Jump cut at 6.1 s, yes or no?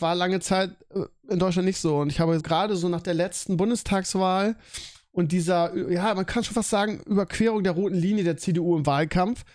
no